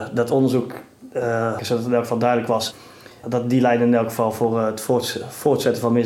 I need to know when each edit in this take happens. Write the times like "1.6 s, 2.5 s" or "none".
1.6 s, 3.2 s